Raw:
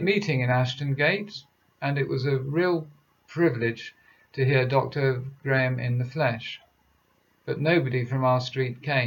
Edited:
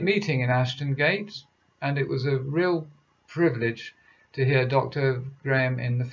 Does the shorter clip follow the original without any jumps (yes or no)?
yes